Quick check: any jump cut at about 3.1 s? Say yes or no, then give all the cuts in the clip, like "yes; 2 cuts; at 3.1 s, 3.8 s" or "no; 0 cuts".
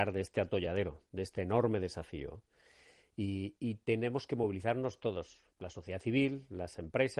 no; 1 cut; at 5.5 s